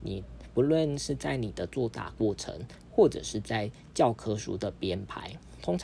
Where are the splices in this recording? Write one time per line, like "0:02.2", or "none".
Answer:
none

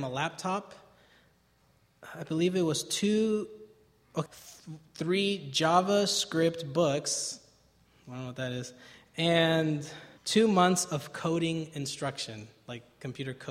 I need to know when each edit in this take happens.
0:04.3
0:10.2

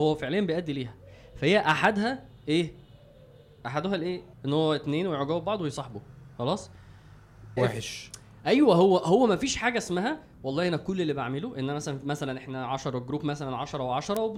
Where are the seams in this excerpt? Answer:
0:04.3
0:07.6

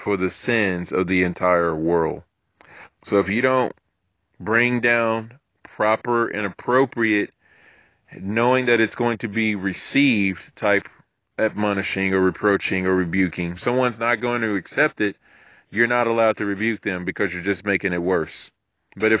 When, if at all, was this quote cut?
0:02.9
0:13.6

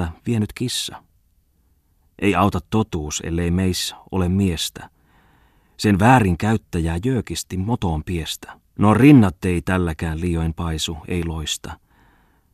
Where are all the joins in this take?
0:08.7

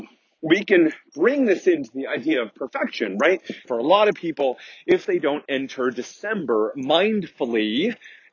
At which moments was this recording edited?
0:03.6

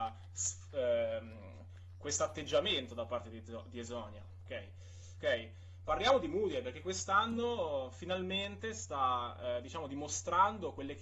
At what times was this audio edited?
0:05.2

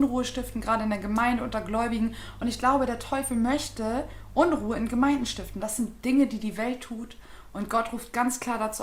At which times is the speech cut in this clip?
0:05.6

